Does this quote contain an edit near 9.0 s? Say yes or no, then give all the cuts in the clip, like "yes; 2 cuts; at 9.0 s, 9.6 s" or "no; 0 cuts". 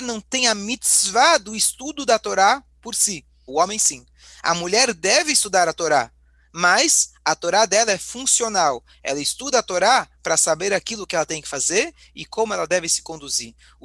no; 1 cut; at 3.5 s